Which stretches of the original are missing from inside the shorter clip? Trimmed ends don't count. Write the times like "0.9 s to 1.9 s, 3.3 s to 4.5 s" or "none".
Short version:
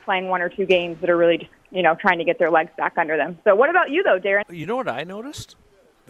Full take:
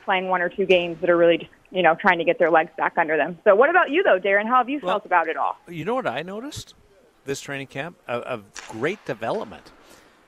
4.4 s to 5.6 s